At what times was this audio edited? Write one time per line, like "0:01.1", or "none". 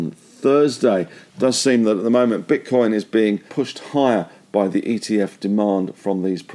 0:03.5